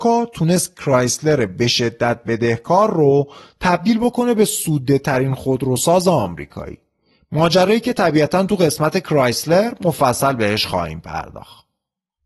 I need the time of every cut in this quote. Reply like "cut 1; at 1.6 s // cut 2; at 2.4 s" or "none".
none